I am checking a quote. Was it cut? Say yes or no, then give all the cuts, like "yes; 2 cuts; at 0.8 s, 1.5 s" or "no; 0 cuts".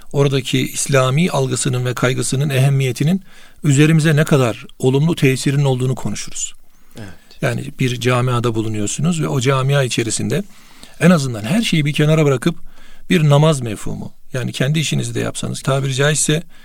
yes; 1 cut; at 15.6 s